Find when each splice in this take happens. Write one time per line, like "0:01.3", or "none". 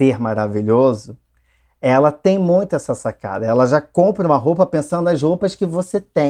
none

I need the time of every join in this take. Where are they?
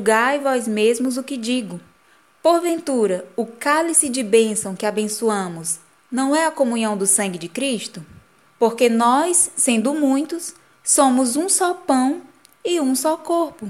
0:08.4

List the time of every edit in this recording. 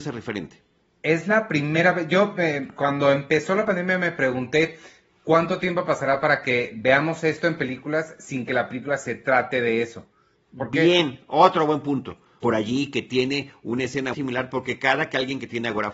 0:10.5
0:12.4
0:14.1

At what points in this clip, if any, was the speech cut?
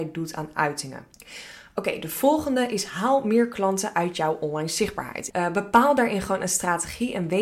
0:01.1
0:05.3

